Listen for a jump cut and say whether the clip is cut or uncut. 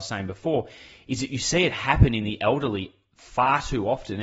uncut